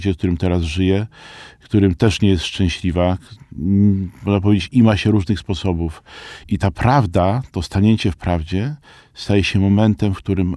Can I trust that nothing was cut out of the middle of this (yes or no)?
no